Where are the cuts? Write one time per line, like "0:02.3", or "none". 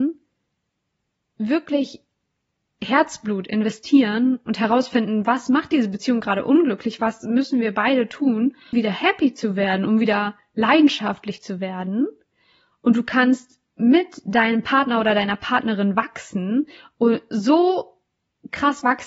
0:08.7

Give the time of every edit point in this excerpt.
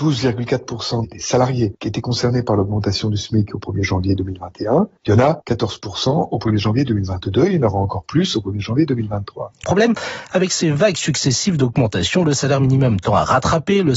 0:05.0
0:09.6

